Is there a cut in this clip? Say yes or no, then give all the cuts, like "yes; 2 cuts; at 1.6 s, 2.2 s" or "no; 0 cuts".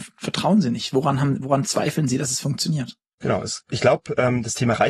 no; 0 cuts